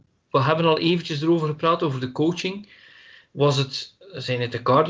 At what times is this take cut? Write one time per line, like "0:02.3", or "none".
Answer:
none